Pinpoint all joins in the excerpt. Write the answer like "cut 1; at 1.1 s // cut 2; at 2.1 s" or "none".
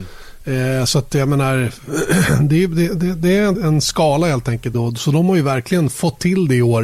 cut 1; at 3.5 s // cut 2; at 4.7 s

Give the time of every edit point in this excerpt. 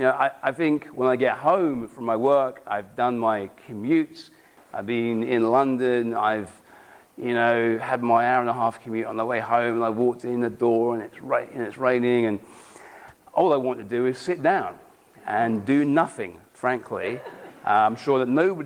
none

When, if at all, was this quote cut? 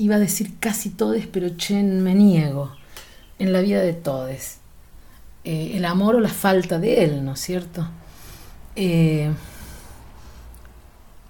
none

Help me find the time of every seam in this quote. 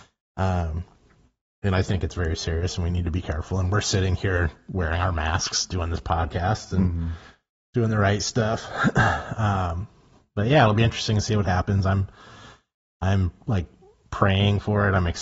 none

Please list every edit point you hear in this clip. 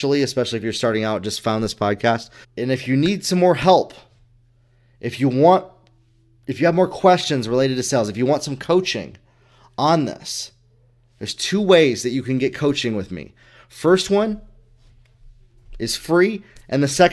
cut 1; at 2.4 s

